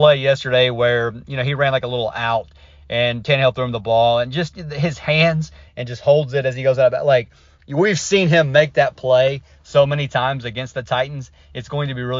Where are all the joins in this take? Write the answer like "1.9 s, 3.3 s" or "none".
5.7 s